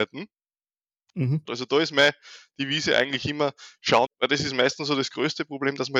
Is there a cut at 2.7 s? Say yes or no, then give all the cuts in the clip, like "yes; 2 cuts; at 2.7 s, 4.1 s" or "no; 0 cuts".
no; 2 cuts; at 1.5 s, 4.1 s